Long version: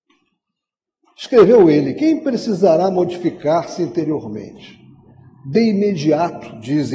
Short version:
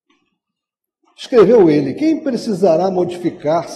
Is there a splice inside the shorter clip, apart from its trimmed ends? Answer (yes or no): no